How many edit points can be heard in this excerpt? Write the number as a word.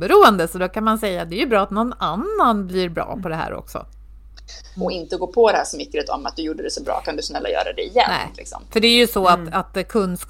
one